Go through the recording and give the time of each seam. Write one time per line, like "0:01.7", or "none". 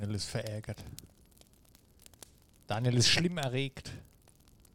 none